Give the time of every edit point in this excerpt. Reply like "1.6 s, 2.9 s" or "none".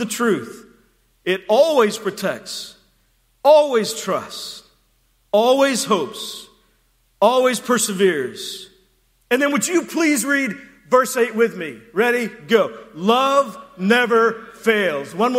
none